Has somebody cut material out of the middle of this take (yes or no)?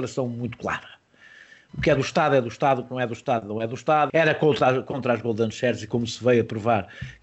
yes